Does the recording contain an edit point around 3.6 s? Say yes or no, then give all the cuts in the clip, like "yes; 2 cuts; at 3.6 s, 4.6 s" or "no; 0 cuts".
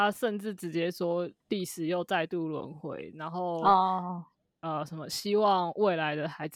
no; 0 cuts